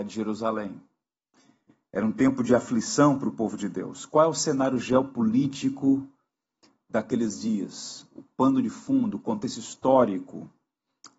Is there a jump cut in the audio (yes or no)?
no